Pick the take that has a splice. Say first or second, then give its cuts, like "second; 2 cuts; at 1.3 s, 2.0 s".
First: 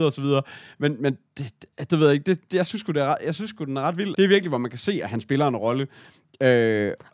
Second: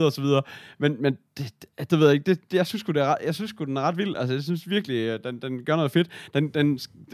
first; 1 cut; at 4.1 s